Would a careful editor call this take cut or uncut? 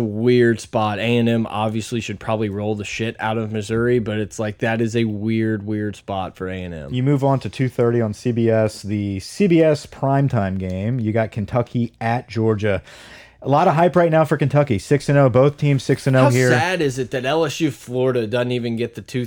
uncut